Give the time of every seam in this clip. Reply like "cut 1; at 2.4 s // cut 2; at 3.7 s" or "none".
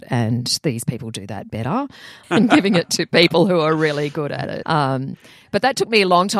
cut 1; at 2.2 s // cut 2; at 4.6 s